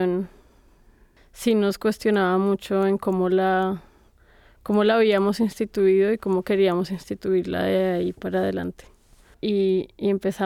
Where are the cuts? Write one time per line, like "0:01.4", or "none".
0:09.3